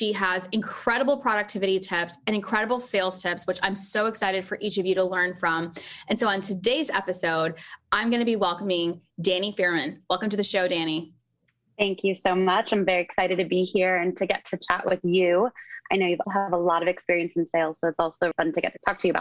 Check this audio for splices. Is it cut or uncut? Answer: cut